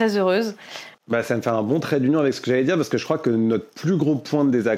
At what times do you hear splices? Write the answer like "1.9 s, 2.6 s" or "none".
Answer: 0.9 s